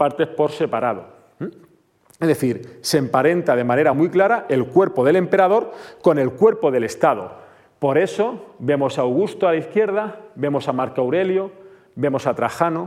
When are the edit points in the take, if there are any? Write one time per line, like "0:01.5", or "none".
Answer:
none